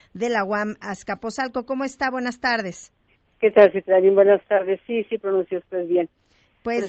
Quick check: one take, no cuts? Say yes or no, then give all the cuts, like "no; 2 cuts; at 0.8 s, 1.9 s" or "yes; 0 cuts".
yes; 0 cuts